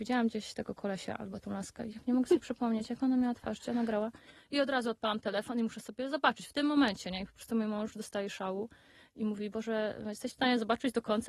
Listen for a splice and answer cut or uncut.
uncut